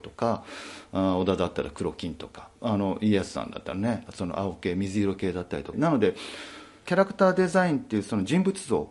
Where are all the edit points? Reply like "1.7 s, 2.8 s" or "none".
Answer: 2.6 s, 5.7 s